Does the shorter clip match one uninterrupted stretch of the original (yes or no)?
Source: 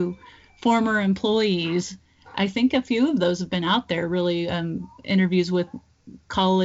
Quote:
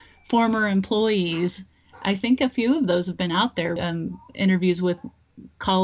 no